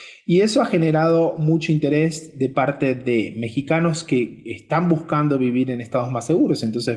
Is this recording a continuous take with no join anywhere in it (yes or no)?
yes